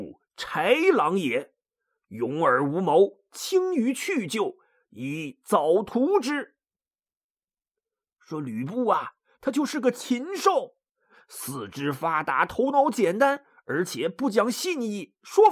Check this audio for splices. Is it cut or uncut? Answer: uncut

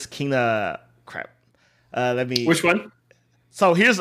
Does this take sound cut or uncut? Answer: uncut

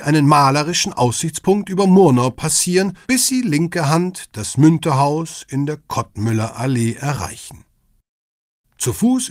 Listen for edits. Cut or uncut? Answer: cut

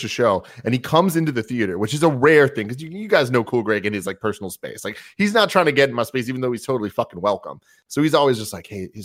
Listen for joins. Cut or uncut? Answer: uncut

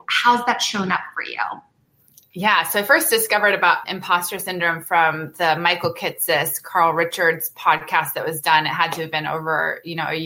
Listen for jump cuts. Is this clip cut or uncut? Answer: cut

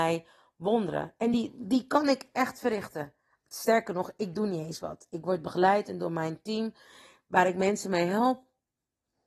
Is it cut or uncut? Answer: uncut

